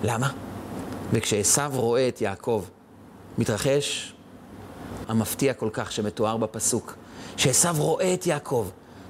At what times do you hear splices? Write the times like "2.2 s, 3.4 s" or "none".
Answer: 1.1 s, 5.0 s

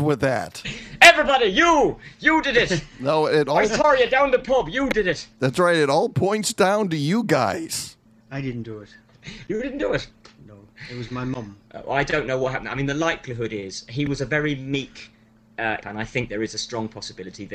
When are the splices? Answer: 15.8 s

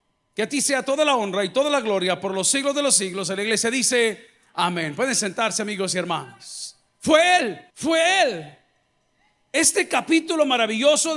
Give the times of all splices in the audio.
7.7 s

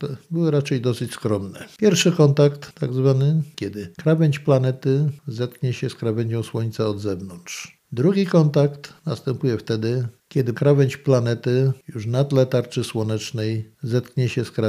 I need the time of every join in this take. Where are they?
1.8 s, 3.5 s

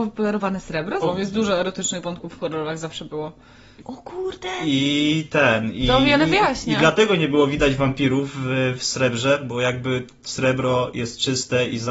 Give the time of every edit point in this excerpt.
1.0 s, 3.8 s

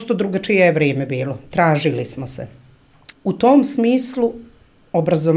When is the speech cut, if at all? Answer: 3.1 s

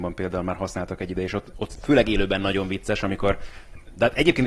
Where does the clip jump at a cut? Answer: none

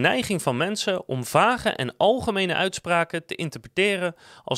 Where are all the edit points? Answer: none

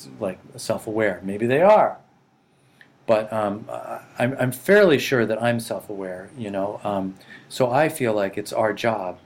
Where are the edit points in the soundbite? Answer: none

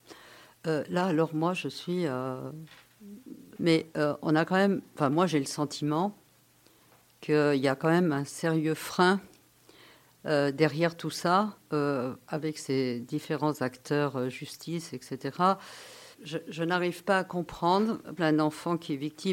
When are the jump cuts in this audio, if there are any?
3.6 s, 16.1 s, 18.2 s

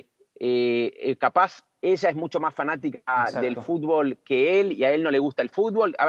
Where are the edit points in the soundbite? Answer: none

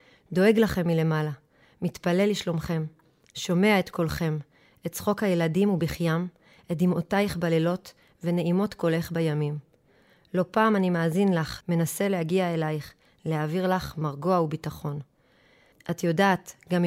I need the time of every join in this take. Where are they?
11.6 s, 15.7 s

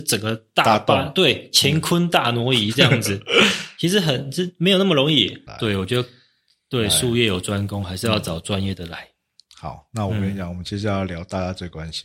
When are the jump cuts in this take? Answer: 5.5 s

